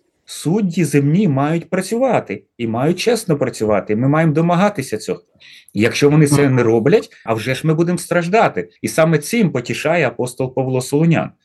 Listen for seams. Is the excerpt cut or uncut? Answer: cut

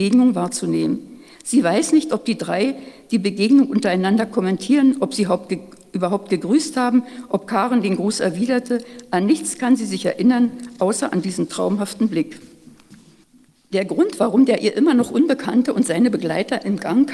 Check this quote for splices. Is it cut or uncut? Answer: uncut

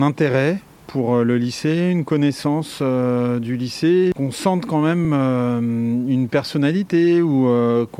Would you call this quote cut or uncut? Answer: uncut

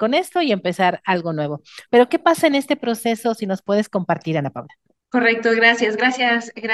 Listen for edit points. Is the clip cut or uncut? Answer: uncut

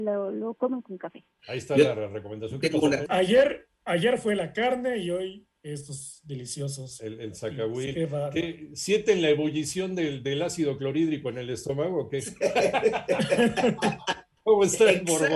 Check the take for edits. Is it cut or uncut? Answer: cut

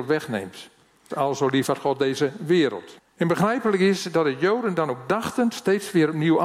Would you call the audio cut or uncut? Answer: cut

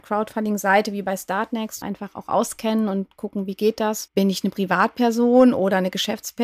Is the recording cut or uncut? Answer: cut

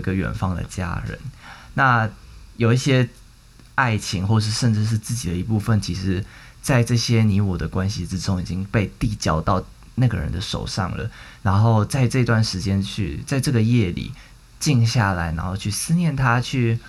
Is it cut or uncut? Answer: uncut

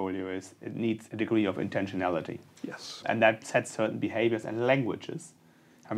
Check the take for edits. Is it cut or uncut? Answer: cut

